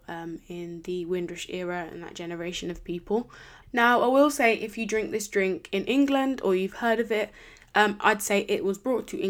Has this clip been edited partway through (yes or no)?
yes